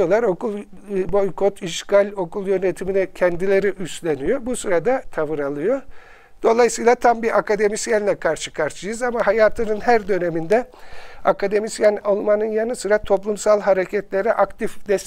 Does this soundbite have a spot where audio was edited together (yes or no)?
yes